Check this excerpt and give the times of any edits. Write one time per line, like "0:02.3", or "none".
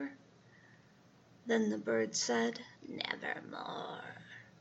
0:01.4
0:02.8